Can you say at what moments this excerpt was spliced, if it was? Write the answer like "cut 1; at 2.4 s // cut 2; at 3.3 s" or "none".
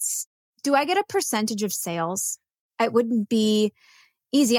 cut 1; at 2.6 s